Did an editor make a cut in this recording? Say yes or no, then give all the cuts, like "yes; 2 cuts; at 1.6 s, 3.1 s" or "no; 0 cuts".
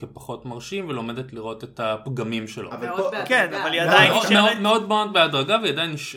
no; 0 cuts